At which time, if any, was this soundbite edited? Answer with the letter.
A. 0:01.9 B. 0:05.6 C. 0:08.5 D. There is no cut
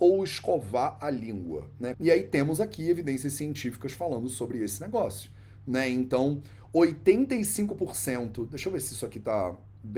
A